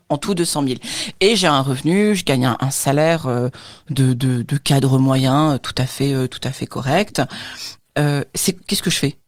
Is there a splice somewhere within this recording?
no; 0 cuts

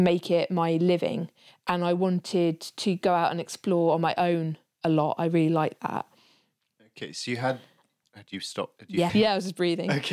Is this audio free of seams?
no; 2 cuts; at 8.1 s, 9.1 s

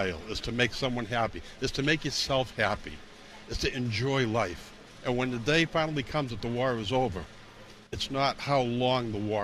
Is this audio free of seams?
no; 1 cut; at 7.9 s

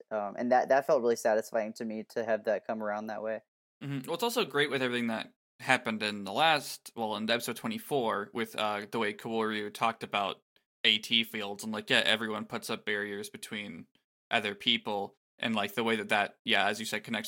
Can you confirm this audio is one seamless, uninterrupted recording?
yes; 0 cuts

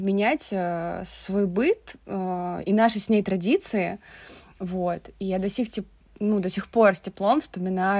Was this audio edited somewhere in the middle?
no; 0 cuts

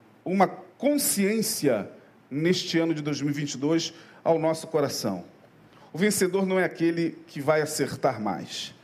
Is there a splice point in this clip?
no; 0 cuts

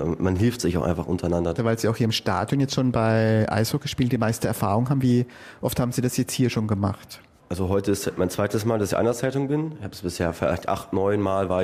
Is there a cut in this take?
yes; 1 cut; at 1.6 s

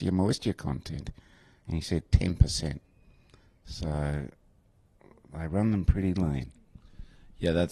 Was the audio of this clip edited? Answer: no; 0 cuts

